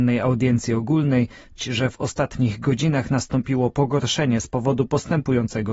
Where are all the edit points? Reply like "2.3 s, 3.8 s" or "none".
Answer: 1.6 s